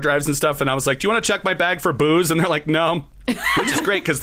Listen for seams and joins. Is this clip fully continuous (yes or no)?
yes